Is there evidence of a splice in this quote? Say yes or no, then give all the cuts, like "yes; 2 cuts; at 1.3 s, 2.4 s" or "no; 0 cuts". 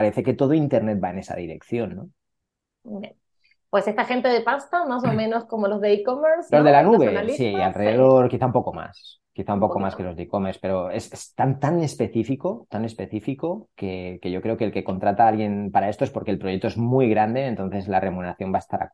no; 0 cuts